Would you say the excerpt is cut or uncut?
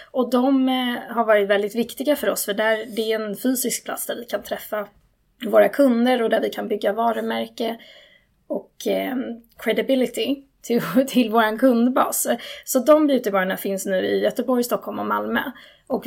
uncut